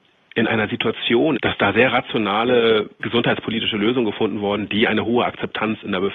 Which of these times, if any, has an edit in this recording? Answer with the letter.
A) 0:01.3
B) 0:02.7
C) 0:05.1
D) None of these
A